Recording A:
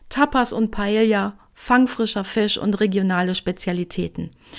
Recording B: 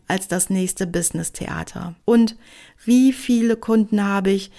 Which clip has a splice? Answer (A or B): B